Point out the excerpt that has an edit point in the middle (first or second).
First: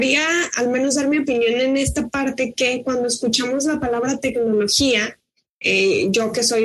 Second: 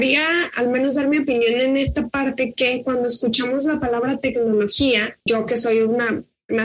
second